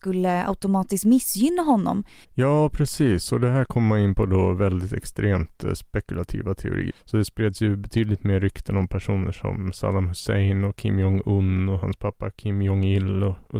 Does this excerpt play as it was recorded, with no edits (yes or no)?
no